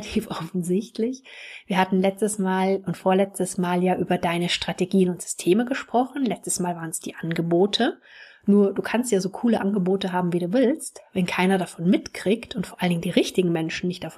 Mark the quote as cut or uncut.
uncut